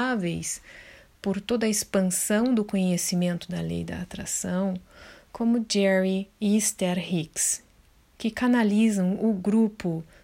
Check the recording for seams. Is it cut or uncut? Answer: uncut